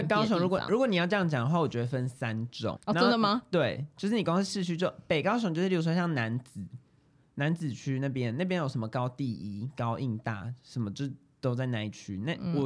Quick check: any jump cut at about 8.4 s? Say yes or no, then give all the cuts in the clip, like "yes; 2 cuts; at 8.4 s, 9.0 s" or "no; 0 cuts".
no; 1 cut; at 2.8 s